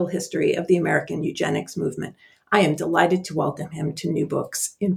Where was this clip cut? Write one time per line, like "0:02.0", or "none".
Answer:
none